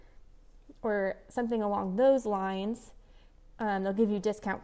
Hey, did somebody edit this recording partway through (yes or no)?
no